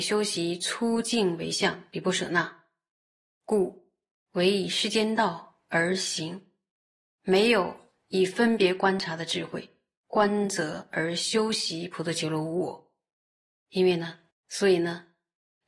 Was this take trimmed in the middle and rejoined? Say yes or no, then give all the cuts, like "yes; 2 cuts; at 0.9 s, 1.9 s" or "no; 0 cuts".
yes; 2 cuts; at 7.1 s, 14.3 s